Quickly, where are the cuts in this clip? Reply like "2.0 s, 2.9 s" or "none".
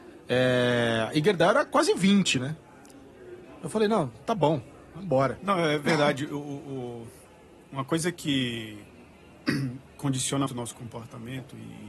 5.4 s, 10.5 s